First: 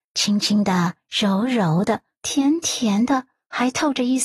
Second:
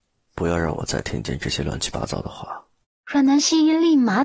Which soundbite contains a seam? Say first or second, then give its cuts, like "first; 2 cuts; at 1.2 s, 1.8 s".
second; 1 cut; at 2.8 s